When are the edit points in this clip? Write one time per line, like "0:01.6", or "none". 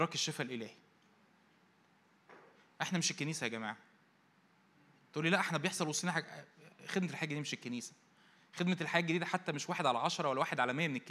none